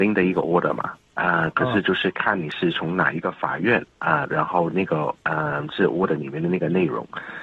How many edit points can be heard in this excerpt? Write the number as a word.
one